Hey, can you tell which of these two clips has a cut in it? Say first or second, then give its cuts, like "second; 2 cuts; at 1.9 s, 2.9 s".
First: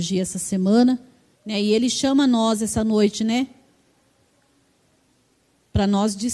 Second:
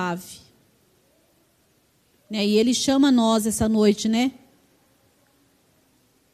first; 1 cut; at 1.4 s